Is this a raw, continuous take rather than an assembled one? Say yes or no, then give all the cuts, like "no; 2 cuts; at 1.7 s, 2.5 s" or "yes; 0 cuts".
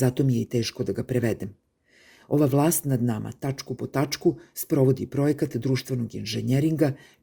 yes; 0 cuts